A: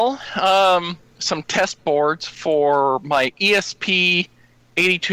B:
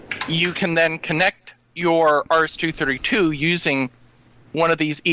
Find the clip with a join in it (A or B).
A